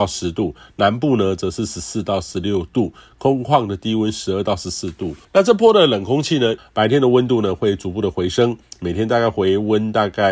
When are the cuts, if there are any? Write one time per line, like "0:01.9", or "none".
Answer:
0:05.2
0:06.6

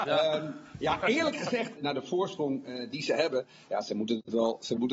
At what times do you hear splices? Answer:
0:01.8

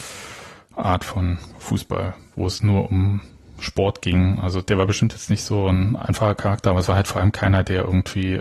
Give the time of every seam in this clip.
0:04.7

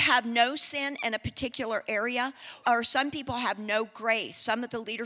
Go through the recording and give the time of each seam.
0:02.6

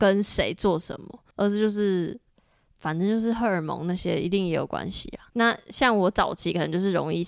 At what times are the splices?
0:01.3
0:05.3

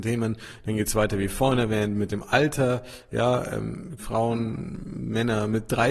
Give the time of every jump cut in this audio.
0:04.0

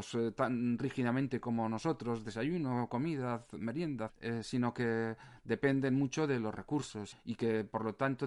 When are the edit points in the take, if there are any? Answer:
0:04.1
0:07.1

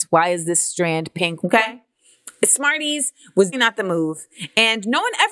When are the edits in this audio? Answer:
0:01.4
0:03.5

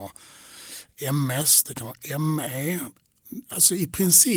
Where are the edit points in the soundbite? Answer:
none

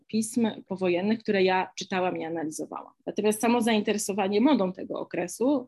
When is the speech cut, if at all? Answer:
0:03.0

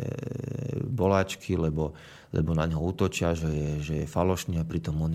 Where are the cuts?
none

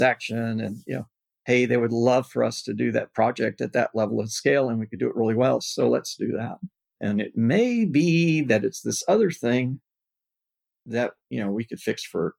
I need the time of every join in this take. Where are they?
0:05.6
0:07.0

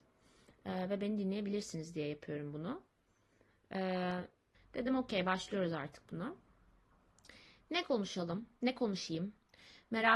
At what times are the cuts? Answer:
0:04.5

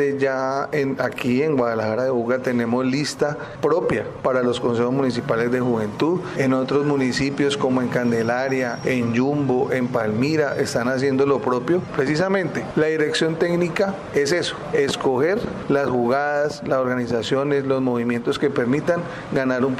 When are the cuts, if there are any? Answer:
0:08.8
0:11.9

